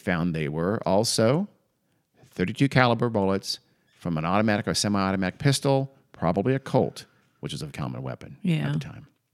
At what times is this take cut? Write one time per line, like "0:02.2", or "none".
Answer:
0:07.7